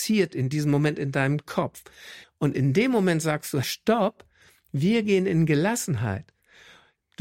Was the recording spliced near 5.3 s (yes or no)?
no